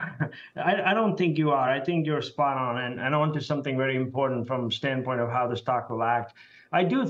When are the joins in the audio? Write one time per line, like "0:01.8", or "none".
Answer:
none